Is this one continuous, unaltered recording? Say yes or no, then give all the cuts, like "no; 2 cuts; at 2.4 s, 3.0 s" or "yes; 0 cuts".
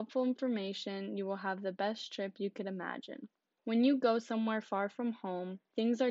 no; 1 cut; at 3.6 s